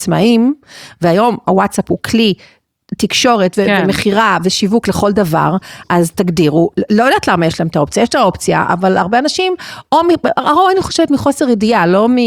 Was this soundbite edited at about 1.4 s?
yes; 1 cut; at 1.4 s

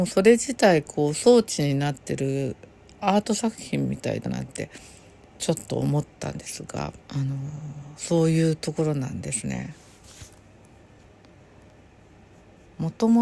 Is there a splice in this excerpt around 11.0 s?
no; 2 cuts; at 4.3 s, 7.0 s

